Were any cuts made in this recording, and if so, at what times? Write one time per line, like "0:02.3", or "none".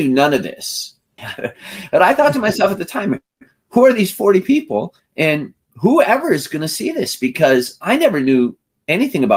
0:01.2